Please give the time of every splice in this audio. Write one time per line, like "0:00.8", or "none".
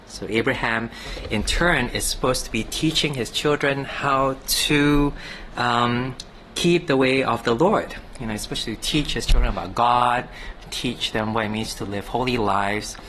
none